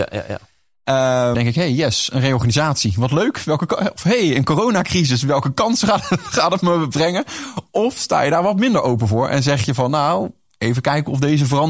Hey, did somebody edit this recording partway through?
yes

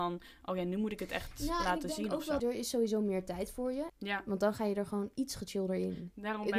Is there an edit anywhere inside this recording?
yes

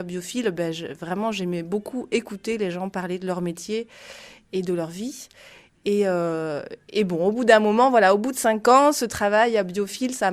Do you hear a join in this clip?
no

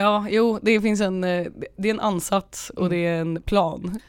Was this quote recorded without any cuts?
yes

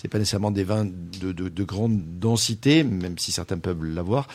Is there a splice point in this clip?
no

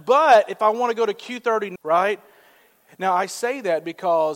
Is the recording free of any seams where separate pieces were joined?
no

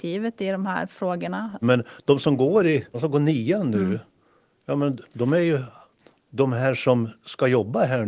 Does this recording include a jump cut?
yes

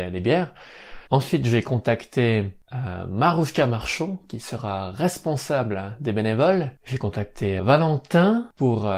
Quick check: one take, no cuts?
no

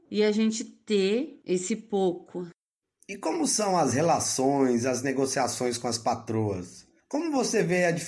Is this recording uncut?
yes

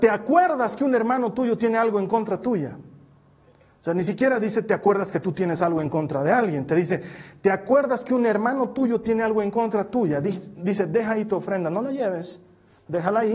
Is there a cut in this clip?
no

